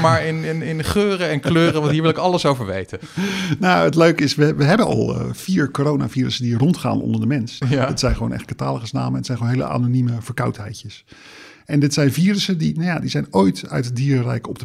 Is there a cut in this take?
yes; 1 cut; at 7.6 s

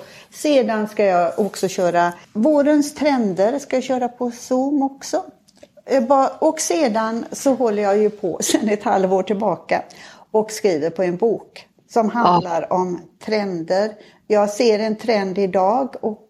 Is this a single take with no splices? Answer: yes; 0 cuts

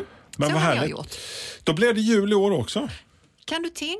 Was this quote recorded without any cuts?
yes; 0 cuts

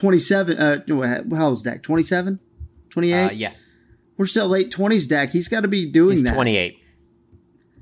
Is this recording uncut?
yes; 0 cuts

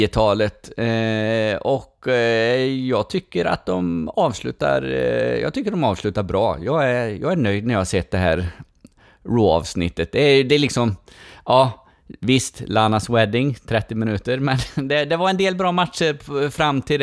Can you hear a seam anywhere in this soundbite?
no; 0 cuts

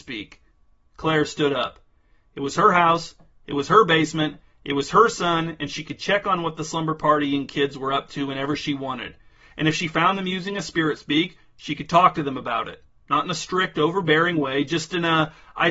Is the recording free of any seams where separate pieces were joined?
yes; 0 cuts

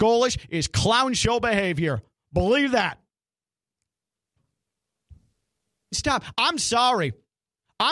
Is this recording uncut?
no; 1 cut; at 5.9 s

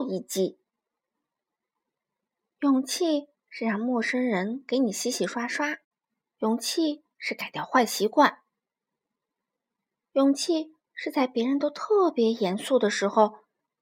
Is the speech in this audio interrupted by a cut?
yes; 1 cut; at 2.5 s

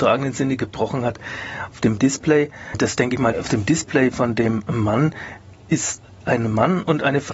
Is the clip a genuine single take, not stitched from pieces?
no; 2 cuts; at 1.7 s, 3.3 s

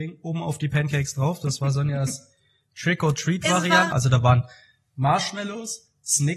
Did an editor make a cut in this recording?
yes; 1 cut; at 3.9 s

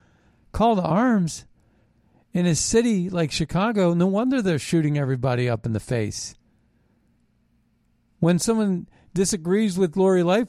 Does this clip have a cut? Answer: yes; 1 cut; at 8.1 s

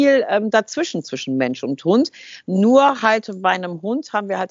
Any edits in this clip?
no; 0 cuts

